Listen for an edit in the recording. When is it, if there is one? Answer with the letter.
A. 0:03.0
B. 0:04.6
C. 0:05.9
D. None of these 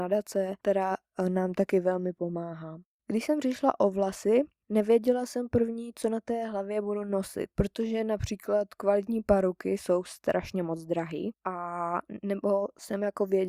A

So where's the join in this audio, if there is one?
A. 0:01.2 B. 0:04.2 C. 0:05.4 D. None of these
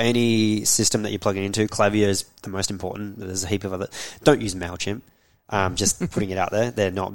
D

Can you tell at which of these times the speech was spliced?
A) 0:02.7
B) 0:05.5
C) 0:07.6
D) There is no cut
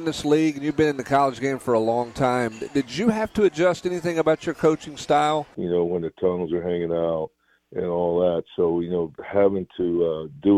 B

